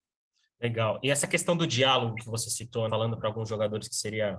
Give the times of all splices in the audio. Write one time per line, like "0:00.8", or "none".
0:02.9